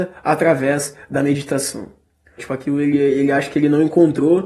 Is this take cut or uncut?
cut